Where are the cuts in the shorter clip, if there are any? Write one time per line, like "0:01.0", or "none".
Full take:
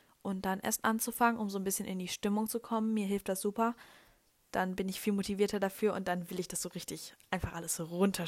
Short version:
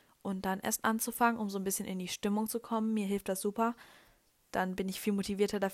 none